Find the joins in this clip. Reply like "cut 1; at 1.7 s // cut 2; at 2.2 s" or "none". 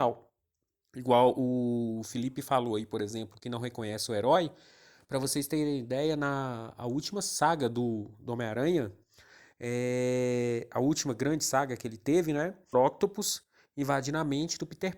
cut 1; at 12.7 s